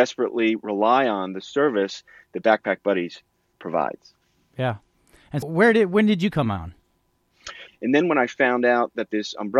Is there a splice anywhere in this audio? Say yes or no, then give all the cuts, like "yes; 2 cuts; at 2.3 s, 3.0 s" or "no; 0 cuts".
yes; 2 cuts; at 5.4 s, 7.7 s